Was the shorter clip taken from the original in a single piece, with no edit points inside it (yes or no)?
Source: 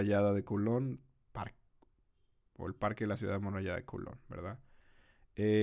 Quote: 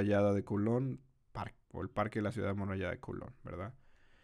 no